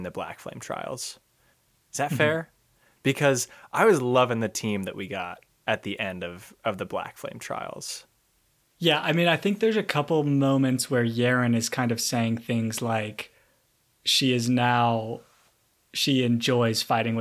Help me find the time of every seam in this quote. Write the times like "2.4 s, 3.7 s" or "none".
none